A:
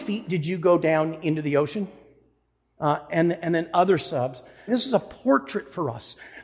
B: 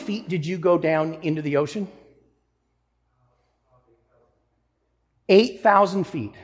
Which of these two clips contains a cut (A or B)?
A